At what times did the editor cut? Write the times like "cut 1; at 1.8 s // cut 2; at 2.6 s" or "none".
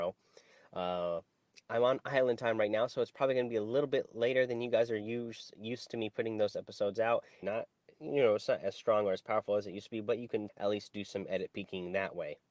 cut 1; at 7.4 s // cut 2; at 10.5 s